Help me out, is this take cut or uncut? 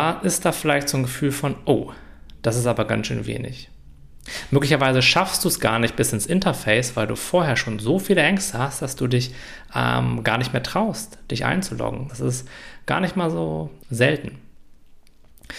cut